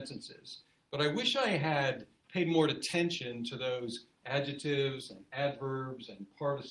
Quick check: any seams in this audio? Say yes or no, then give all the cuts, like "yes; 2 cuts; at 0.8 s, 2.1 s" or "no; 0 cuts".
no; 0 cuts